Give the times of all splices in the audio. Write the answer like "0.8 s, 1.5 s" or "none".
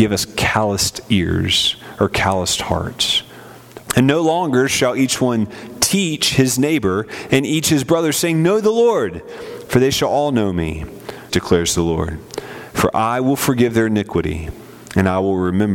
3.8 s, 11.3 s

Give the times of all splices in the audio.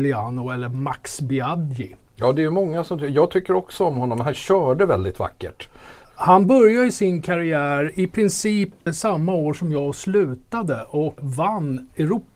none

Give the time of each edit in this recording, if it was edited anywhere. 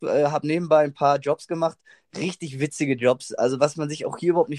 none

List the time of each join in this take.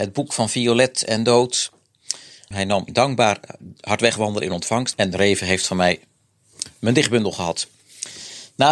2.5 s, 4.9 s

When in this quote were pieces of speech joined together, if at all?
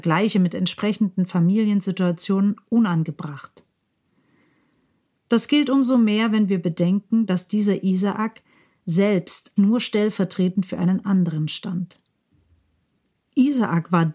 9.6 s

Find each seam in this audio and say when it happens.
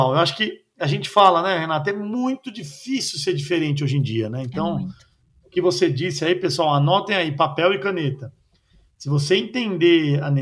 none

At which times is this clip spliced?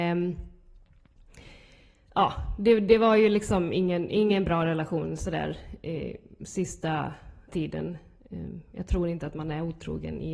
7.5 s

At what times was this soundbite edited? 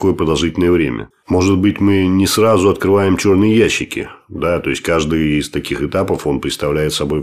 1.1 s

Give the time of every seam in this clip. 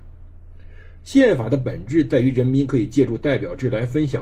1.0 s

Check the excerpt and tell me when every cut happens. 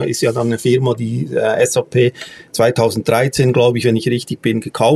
none

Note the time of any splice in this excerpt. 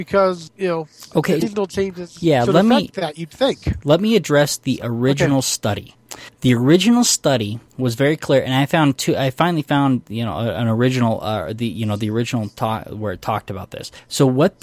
1.4 s

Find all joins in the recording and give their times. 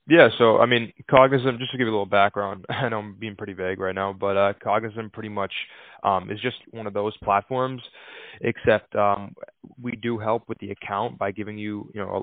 6.6 s

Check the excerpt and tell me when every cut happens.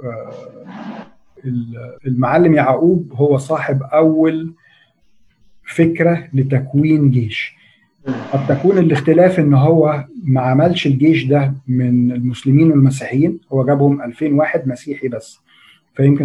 2.0 s

